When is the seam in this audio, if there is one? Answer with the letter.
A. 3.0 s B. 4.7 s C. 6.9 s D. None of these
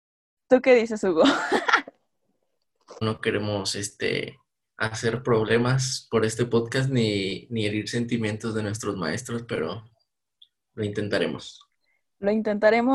A